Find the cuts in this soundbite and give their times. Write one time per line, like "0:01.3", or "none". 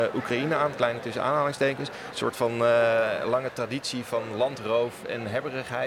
0:02.1